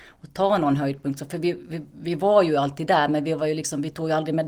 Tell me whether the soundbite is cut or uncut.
uncut